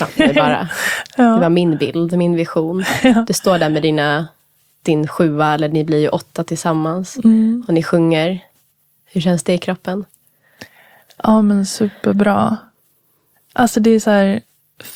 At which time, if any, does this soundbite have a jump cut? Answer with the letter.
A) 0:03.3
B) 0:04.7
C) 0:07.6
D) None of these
D